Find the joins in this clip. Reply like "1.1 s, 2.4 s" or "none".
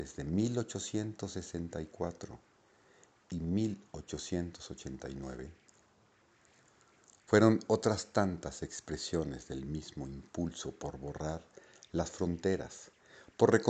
none